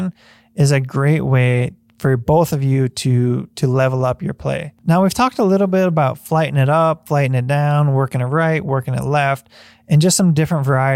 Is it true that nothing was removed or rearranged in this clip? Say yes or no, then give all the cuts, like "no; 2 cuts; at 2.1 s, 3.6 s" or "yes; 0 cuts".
yes; 0 cuts